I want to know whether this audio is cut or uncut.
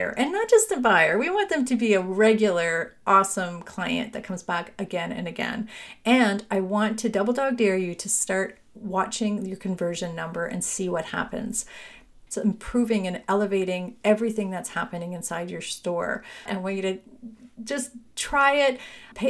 cut